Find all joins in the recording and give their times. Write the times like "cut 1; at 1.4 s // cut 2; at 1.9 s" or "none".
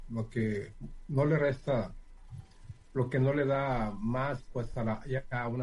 none